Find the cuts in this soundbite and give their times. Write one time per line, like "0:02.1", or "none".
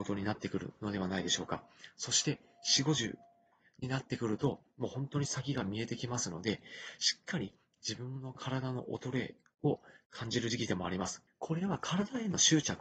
0:11.3